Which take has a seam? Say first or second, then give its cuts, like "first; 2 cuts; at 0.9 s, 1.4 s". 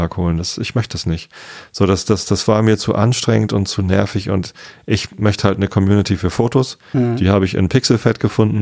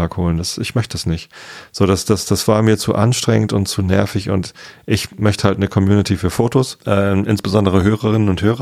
second; 1 cut; at 6.8 s